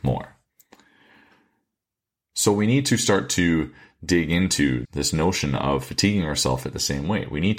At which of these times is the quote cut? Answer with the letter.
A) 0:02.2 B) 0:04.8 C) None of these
B